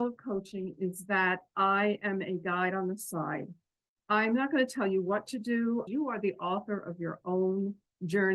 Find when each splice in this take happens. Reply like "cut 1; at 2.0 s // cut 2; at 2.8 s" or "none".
cut 1; at 5.9 s